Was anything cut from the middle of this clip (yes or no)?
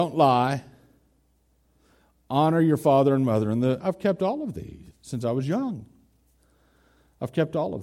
yes